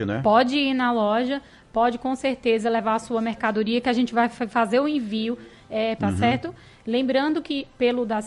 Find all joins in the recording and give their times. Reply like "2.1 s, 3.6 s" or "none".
6.0 s